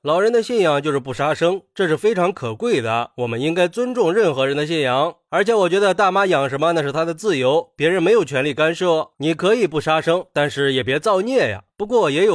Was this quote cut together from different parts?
yes; 1 cut; at 9.1 s

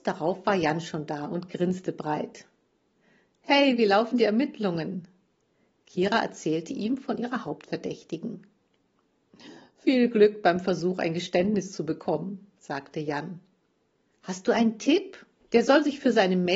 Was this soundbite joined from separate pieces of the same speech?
yes; 1 cut; at 15.4 s

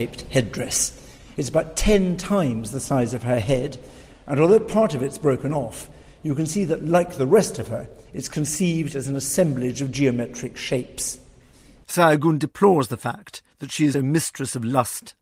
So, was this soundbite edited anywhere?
yes; 2 cuts; at 11.8 s, 13.9 s

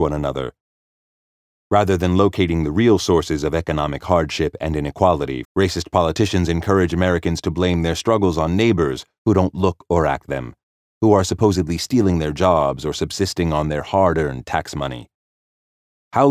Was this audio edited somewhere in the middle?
yes; 2 cuts; at 5.4 s, 10.2 s

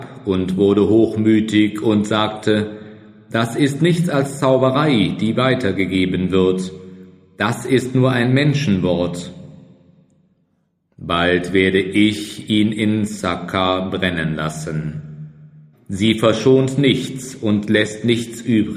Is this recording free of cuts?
no; 1 cut; at 15.7 s

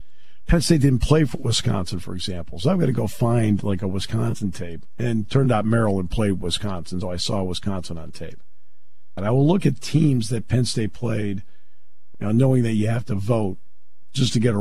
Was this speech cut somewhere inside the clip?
yes; 3 cuts; at 7.0 s, 9.2 s, 12.1 s

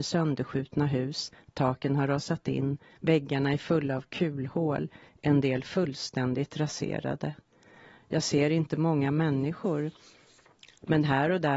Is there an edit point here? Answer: no; 0 cuts

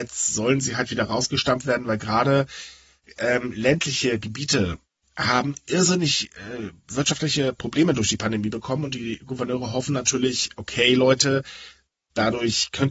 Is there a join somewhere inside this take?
no; 0 cuts

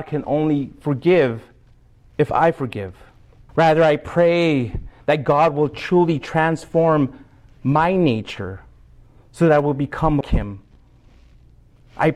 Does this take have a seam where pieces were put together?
yes; 2 cuts; at 3.5 s, 10.2 s

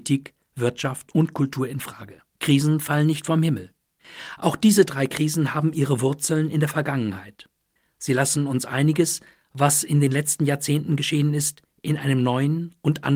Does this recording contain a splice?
yes; 1 cut; at 2.3 s

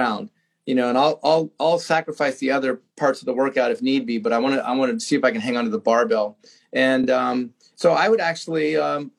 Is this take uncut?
yes; 0 cuts

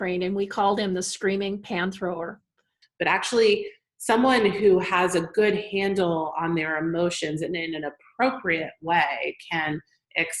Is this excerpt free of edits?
no; 1 cut; at 2.8 s

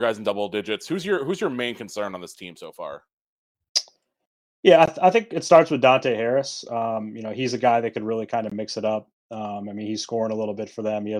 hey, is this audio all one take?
yes; 0 cuts

